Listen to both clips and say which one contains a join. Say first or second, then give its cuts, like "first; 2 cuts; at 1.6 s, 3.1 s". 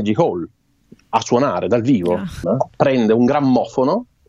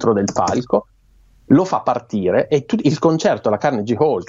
first; 1 cut; at 2.4 s